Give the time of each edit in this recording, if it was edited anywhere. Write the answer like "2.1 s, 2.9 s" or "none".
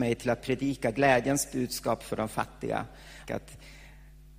3.2 s